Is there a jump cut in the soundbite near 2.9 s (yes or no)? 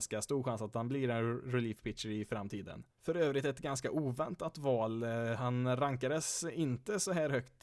yes